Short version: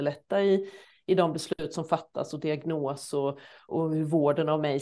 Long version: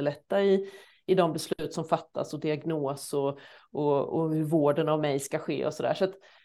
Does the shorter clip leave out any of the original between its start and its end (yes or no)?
yes